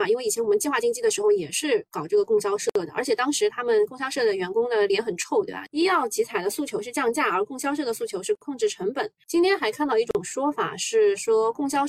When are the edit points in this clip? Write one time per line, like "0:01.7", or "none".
0:05.7
0:09.2